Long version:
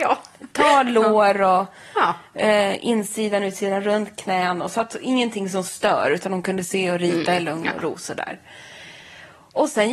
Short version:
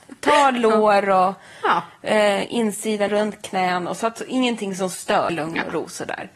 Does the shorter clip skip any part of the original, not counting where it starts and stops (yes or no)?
yes